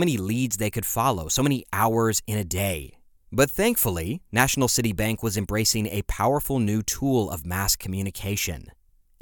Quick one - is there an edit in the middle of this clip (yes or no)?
no